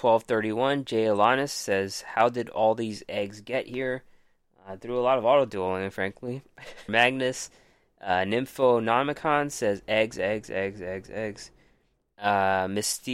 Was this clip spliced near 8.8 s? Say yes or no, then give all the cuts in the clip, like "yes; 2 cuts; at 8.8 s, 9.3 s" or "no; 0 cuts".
no; 2 cuts; at 6.9 s, 12.1 s